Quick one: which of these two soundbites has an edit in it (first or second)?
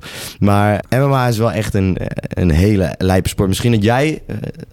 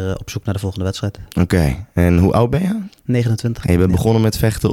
second